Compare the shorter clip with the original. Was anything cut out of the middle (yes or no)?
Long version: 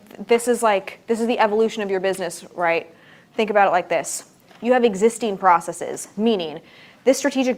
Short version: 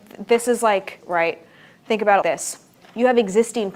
yes